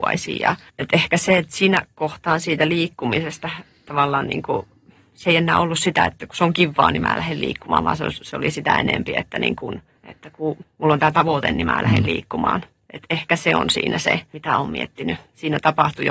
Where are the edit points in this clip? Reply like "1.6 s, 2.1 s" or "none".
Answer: none